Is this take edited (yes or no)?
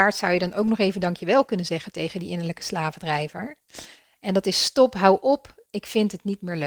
yes